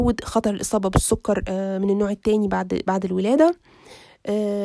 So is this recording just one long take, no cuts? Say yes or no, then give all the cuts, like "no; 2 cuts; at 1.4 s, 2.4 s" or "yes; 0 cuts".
yes; 0 cuts